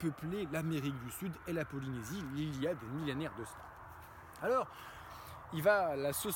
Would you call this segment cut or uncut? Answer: uncut